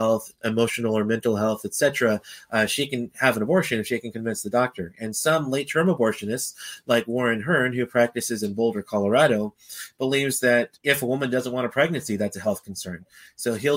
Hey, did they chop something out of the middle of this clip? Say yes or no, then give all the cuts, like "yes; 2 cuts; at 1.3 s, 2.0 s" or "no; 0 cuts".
no; 0 cuts